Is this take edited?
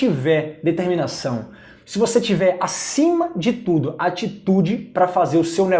yes; 1 cut; at 1.8 s

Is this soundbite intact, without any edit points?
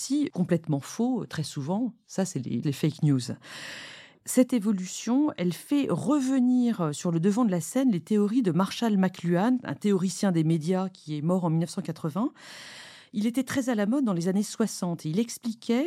no; 1 cut; at 2.6 s

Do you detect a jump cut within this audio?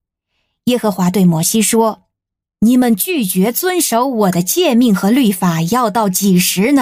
no; 0 cuts

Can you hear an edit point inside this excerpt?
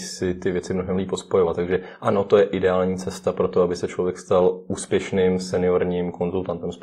no; 0 cuts

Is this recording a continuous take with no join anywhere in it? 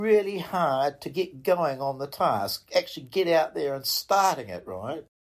yes; 0 cuts

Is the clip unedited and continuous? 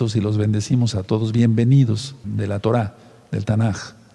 no; 1 cut; at 2.2 s

